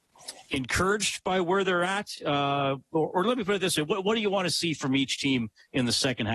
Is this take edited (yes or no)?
no